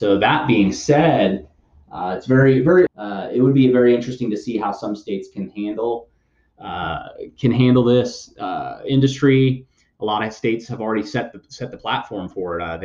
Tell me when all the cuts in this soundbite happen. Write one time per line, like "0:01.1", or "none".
0:02.9